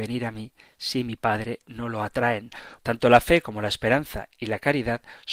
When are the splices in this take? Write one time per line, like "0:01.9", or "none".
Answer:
0:02.8

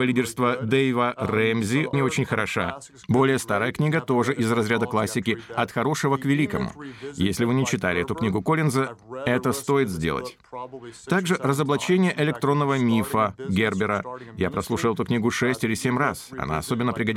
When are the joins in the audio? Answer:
0:01.9

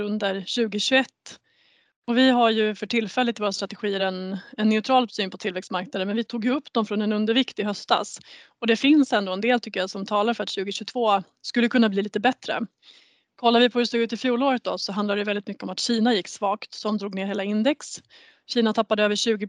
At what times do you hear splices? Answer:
none

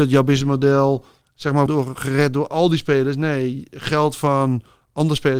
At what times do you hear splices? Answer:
0:01.7

